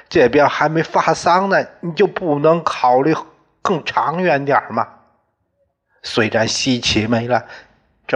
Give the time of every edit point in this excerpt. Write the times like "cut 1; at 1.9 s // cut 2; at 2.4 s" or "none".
none